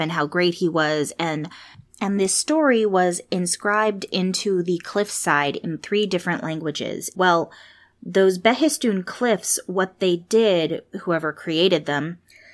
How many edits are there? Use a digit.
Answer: 1